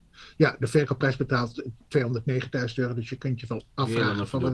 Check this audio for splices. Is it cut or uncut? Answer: uncut